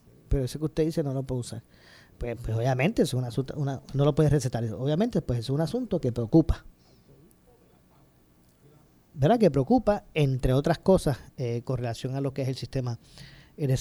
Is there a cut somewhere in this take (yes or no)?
no